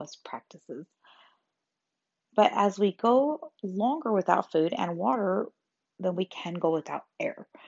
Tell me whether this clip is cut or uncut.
cut